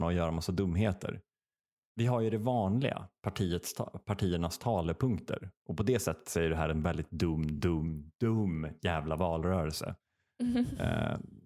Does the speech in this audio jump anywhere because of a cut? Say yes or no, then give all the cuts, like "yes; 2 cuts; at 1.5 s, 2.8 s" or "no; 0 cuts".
no; 0 cuts